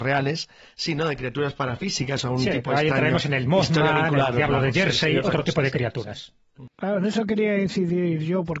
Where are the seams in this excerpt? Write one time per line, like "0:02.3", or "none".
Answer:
none